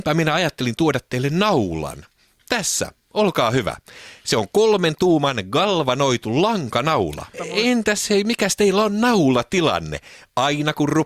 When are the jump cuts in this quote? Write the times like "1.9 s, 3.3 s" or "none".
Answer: 7.3 s